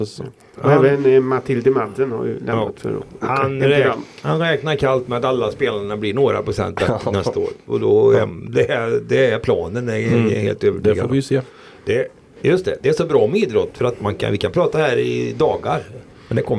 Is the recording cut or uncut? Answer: uncut